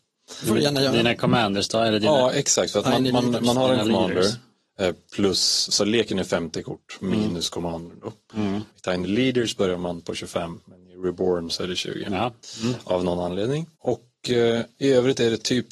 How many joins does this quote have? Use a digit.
1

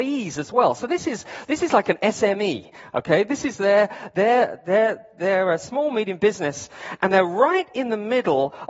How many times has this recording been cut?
0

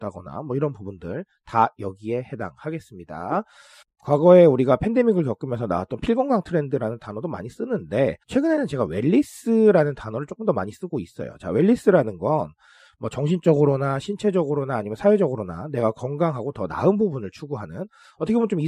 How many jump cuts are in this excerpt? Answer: 2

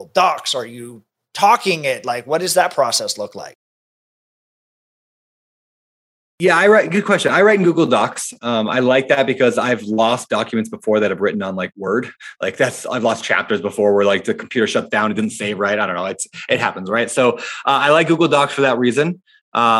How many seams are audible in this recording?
0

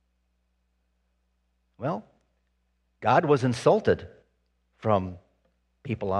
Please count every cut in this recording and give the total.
0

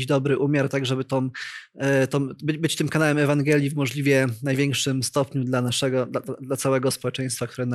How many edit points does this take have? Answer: 0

